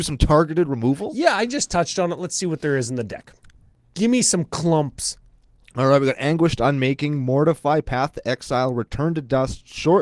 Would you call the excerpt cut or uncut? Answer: uncut